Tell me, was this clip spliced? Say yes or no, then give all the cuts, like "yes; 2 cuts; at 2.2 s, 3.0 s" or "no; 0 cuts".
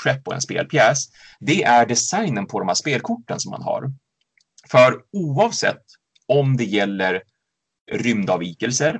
no; 0 cuts